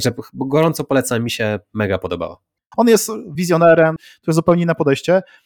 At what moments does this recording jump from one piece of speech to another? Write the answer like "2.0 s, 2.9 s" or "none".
2.7 s, 4.0 s

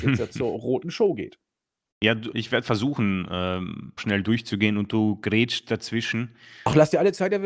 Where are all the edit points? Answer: 2.3 s, 4.0 s

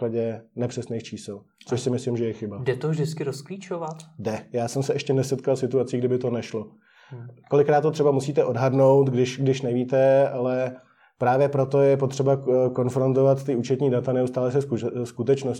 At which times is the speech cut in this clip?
none

